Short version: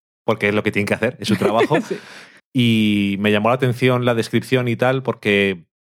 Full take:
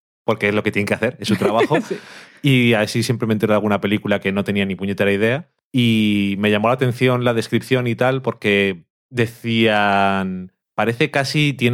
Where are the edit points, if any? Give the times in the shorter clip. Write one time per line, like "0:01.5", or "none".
0:02.4